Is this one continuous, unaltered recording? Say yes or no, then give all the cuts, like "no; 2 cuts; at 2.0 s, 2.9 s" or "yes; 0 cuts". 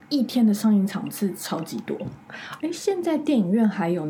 no; 1 cut; at 2.6 s